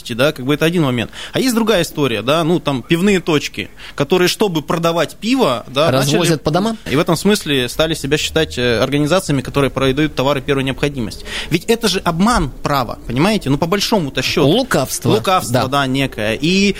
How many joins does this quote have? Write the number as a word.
one